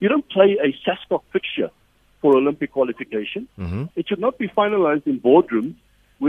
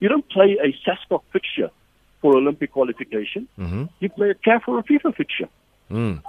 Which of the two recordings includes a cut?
first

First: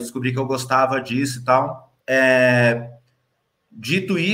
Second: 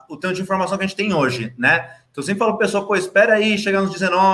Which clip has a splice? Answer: first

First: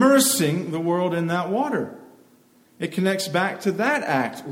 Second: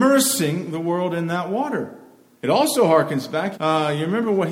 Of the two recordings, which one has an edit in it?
second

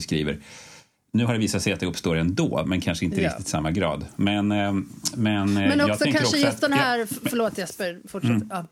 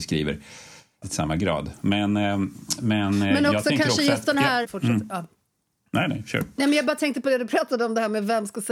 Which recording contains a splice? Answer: second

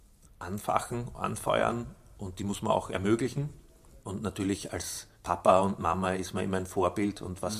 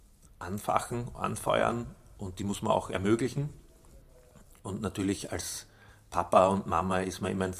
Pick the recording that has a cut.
first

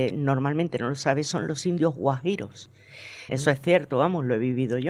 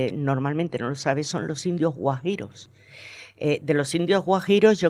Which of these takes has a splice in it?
first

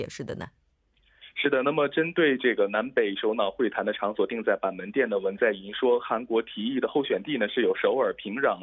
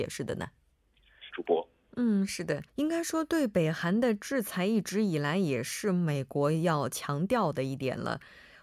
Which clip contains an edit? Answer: second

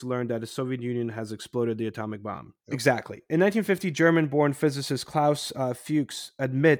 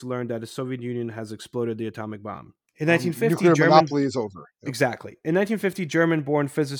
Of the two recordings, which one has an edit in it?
first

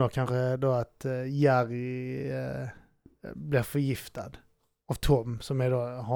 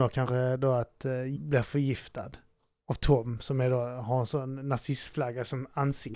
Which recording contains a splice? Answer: second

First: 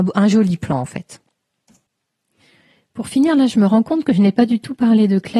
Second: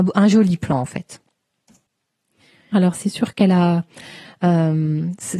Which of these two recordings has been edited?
second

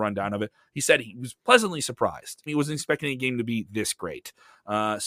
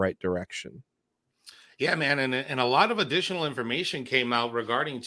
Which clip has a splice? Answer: first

